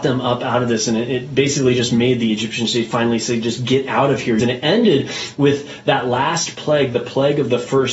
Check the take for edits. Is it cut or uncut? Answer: cut